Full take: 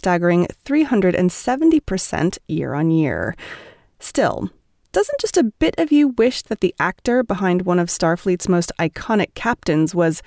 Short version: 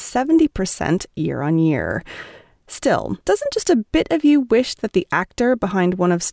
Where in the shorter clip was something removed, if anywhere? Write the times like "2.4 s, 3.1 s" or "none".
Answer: 3.2 s